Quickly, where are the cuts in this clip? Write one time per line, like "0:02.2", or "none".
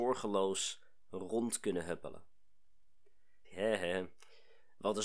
0:03.4